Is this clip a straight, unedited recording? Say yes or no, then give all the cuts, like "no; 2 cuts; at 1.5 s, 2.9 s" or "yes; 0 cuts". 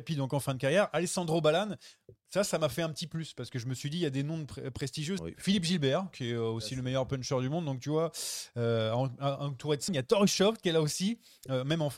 no; 2 cuts; at 5.2 s, 9.9 s